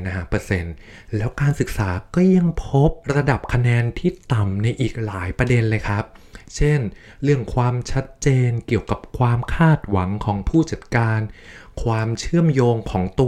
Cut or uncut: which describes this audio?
cut